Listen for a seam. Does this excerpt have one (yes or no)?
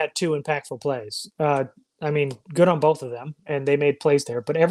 no